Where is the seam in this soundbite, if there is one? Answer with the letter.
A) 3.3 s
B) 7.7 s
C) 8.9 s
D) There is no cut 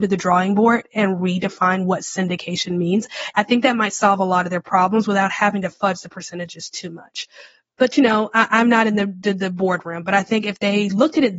A